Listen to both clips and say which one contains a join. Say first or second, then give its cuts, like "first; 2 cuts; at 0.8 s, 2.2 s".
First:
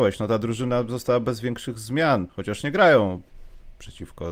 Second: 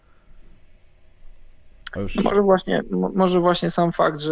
first; 1 cut; at 2.3 s